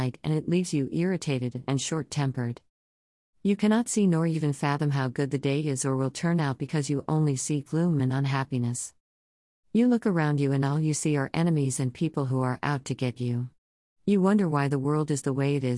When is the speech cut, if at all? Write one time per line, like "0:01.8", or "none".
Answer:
none